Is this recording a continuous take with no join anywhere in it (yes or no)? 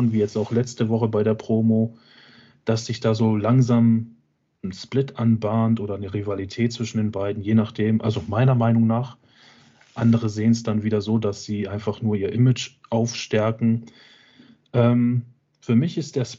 yes